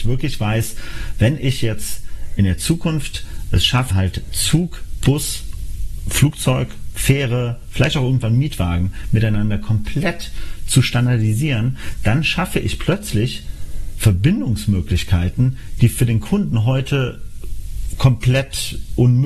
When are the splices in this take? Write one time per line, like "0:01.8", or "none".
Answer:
0:03.9